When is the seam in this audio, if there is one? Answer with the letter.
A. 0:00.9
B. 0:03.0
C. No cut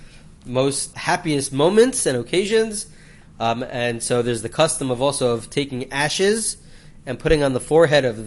A